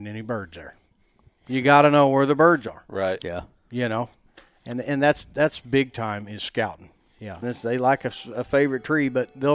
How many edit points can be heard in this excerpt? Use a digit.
1